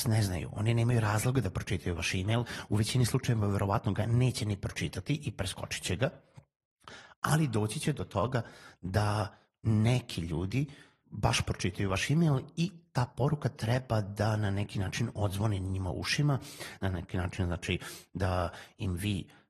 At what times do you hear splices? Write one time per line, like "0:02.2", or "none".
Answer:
0:11.0
0:16.8